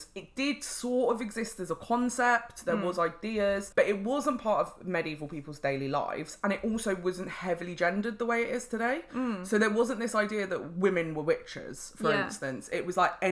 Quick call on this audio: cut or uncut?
uncut